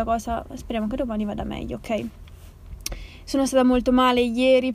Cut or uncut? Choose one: uncut